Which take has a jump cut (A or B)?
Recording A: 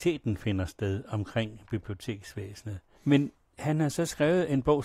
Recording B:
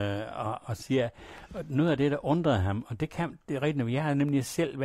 A